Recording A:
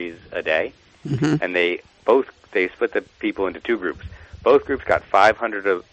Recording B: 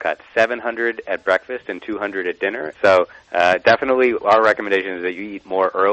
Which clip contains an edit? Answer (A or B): B